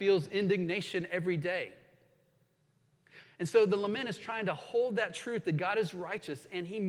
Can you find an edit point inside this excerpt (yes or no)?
yes